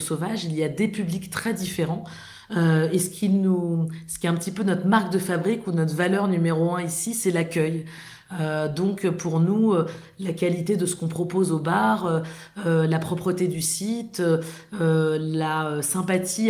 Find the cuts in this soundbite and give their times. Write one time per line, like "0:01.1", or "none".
none